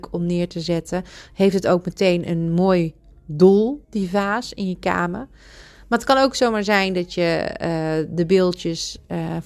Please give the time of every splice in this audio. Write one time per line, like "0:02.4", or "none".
none

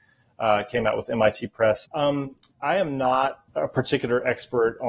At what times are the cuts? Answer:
0:01.9
0:03.5

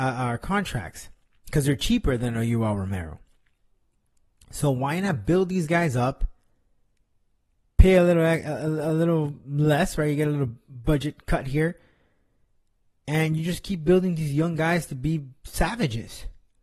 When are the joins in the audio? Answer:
none

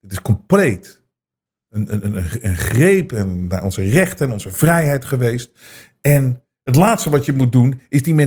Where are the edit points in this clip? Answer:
none

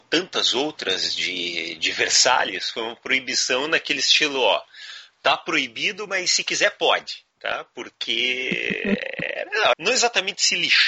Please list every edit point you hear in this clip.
0:07.3
0:09.7

